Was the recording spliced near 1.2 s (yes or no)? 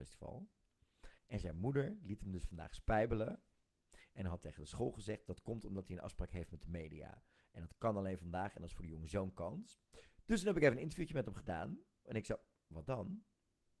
yes